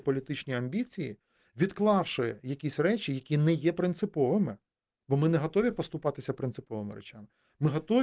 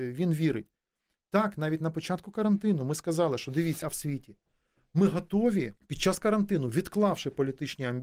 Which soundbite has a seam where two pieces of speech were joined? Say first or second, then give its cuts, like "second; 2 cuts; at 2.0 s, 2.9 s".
second; 2 cuts; at 3.8 s, 5.8 s